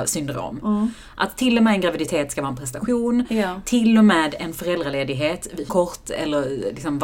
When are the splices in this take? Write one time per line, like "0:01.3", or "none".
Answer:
0:05.7